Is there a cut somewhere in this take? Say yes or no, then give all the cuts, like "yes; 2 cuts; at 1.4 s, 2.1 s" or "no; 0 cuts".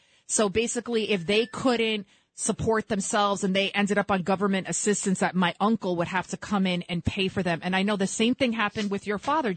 no; 0 cuts